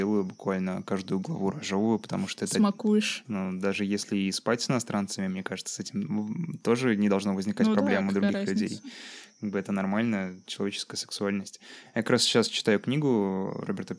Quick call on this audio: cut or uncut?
cut